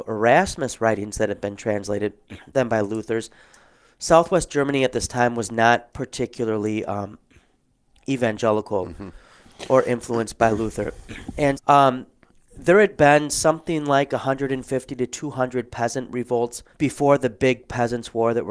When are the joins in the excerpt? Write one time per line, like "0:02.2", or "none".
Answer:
0:11.6
0:16.7